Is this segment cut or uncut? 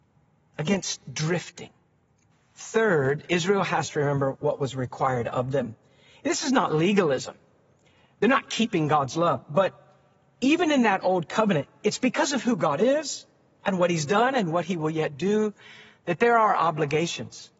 uncut